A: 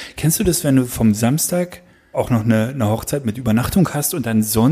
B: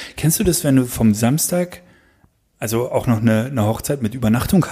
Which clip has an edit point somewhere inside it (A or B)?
A